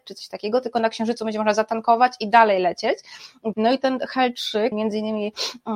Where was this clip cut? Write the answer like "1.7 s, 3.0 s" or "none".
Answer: 3.5 s, 4.7 s